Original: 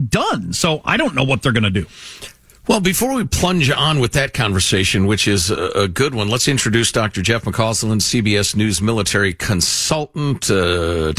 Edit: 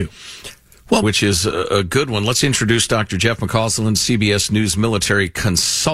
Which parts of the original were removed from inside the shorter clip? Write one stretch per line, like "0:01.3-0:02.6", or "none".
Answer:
0:02.8-0:05.1